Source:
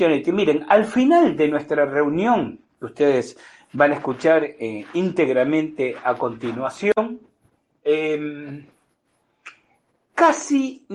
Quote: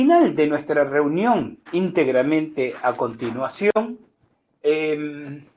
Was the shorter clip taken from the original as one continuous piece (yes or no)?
no